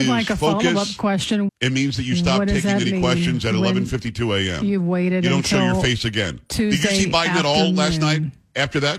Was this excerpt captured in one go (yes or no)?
no